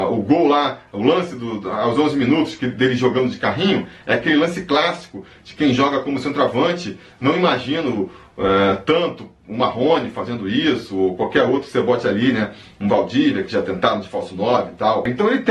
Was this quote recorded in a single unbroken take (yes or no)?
yes